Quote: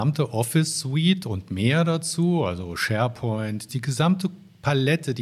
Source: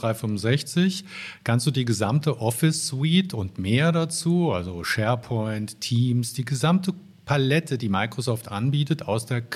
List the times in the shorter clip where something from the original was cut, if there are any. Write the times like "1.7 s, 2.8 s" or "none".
3.7 s